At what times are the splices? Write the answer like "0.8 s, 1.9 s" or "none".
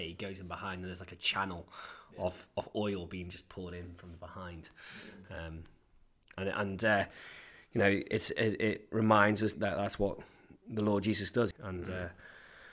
9.5 s, 11.5 s